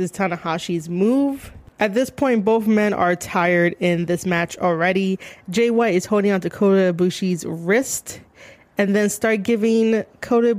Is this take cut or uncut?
uncut